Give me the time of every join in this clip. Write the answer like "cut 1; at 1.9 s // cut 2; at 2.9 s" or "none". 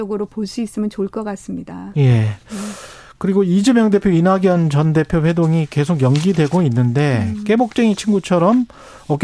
none